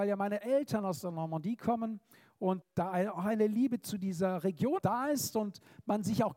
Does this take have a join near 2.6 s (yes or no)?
yes